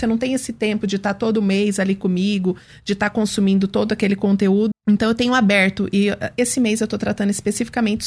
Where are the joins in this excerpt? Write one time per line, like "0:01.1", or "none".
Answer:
0:04.7